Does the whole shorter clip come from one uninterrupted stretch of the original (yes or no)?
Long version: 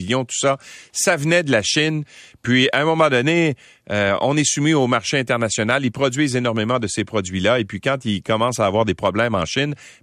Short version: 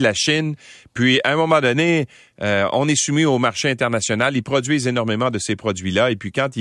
yes